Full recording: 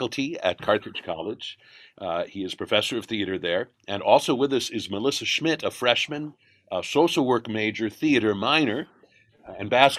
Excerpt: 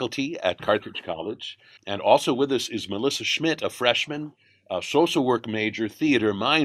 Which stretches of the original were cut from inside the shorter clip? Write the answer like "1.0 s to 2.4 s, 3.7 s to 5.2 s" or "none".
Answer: 1.8 s to 3.8 s